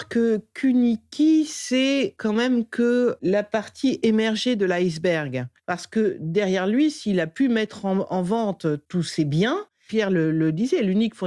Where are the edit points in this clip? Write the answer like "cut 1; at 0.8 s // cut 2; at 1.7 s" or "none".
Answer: cut 1; at 5.6 s // cut 2; at 9.9 s